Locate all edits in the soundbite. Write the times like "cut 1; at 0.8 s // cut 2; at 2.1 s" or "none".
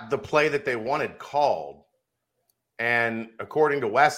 none